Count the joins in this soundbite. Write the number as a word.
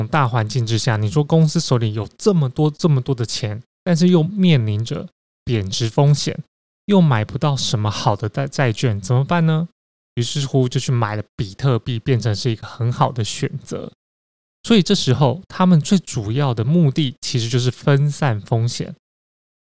zero